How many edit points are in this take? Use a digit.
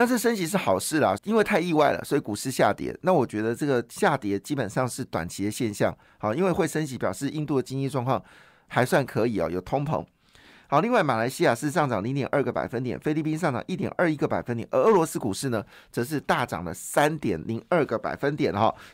1